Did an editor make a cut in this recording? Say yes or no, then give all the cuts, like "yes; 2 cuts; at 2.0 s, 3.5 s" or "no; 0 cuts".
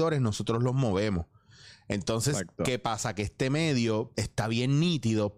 yes; 1 cut; at 4.1 s